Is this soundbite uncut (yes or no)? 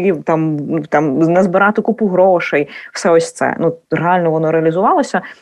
yes